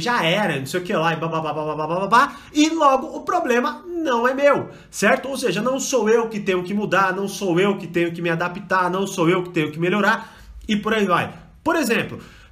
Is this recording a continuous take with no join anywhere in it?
yes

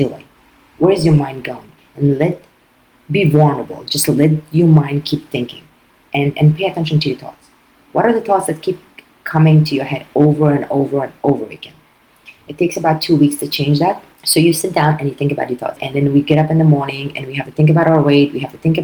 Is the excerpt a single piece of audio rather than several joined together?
no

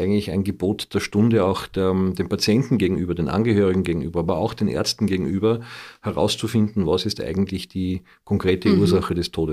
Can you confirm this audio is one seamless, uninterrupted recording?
yes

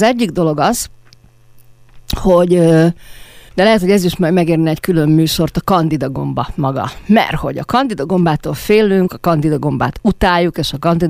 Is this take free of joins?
no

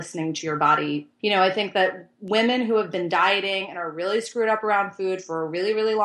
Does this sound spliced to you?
yes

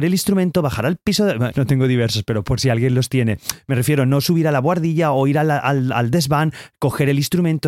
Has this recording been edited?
yes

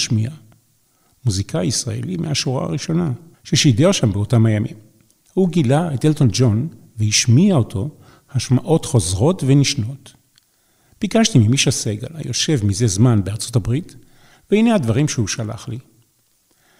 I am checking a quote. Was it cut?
yes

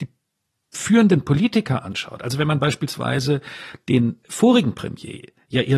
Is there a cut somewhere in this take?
yes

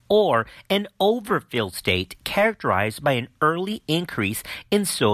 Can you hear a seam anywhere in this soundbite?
no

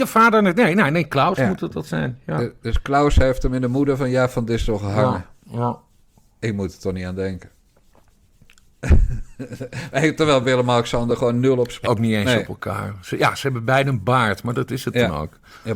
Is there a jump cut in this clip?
yes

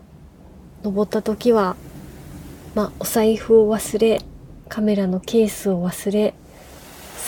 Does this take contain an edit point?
no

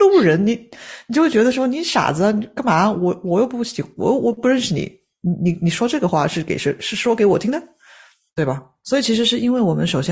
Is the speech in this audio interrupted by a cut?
no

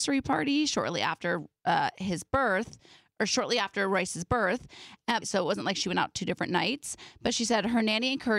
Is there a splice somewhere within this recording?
yes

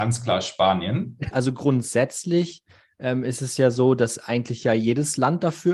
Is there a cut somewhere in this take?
yes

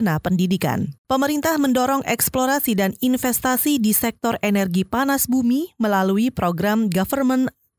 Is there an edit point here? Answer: yes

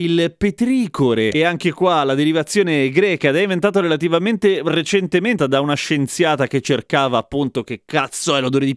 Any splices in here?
yes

